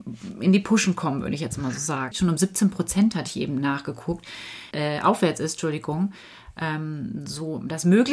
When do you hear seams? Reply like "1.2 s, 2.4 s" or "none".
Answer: 2.1 s, 4.7 s